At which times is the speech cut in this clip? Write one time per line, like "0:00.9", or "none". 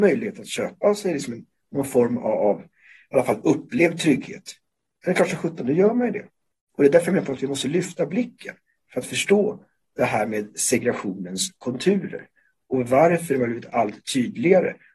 none

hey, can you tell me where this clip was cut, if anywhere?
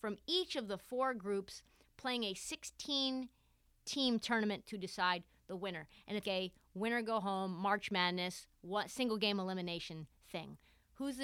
0:06.2

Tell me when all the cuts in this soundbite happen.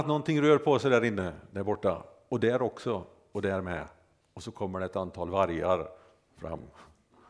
none

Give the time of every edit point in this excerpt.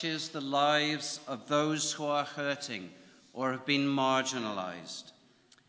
none

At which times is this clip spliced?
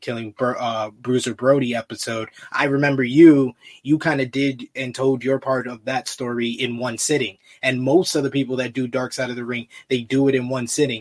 none

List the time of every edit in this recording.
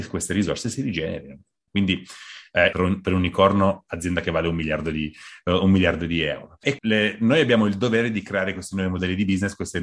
0:01.7
0:02.7
0:06.8

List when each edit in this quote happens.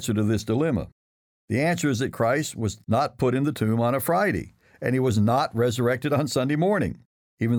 none

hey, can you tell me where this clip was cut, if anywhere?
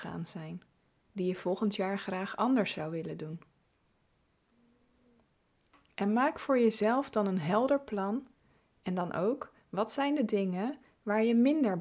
0:08.6

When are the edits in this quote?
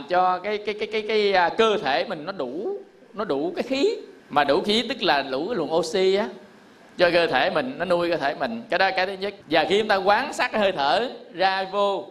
0:04.2
0:09.4

